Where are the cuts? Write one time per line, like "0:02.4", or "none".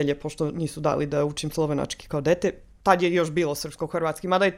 0:02.7